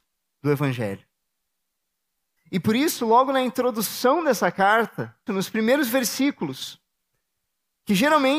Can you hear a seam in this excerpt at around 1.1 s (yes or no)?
no